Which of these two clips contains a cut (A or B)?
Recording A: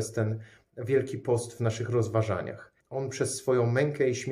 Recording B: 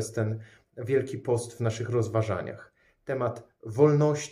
A